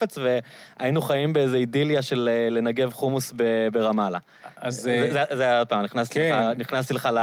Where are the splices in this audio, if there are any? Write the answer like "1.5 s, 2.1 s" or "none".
4.5 s